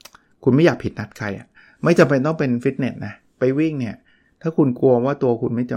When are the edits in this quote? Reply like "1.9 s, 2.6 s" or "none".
none